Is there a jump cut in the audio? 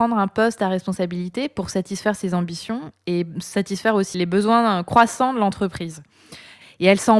yes; 1 cut; at 4.1 s

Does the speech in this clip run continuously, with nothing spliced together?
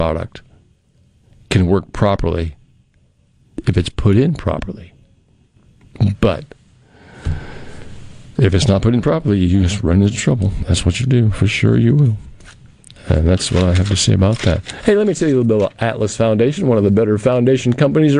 yes; 0 cuts

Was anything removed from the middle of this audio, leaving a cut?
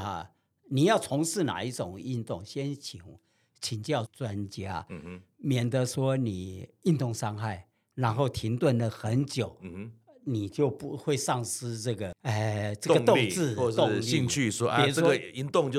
yes; 1 cut; at 4.1 s

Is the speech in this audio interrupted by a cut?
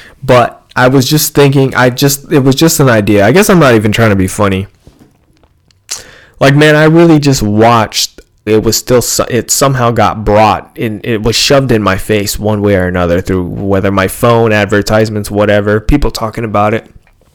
yes; 1 cut; at 8.5 s

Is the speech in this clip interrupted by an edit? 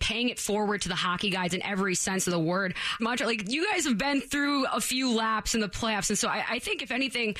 yes; 1 cut; at 3.0 s

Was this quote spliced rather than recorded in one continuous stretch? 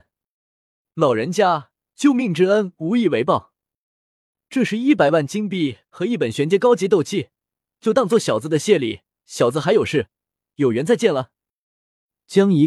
no; 0 cuts

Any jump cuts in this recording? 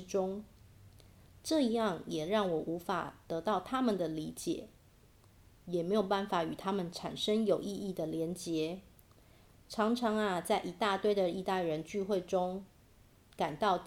no; 0 cuts

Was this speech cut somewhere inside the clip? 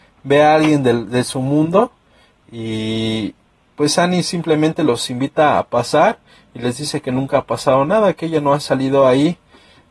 no; 0 cuts

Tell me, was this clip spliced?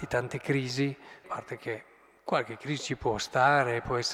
yes; 1 cut; at 1.2 s

